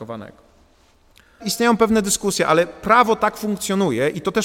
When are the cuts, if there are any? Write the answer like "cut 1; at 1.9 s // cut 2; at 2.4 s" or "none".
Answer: cut 1; at 1.4 s